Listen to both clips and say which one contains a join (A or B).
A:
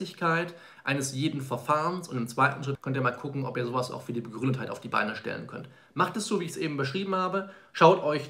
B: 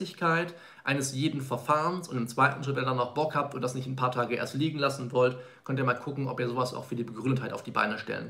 A